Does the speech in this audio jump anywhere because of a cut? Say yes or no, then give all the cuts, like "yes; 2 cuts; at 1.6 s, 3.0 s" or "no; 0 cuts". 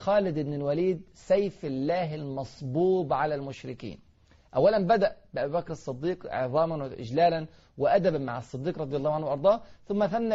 no; 0 cuts